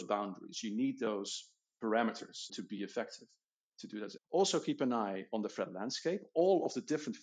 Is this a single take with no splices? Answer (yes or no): no